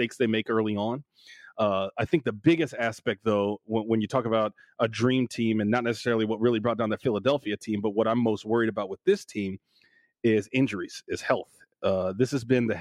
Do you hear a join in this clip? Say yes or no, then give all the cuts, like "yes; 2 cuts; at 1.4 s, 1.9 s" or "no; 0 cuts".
no; 0 cuts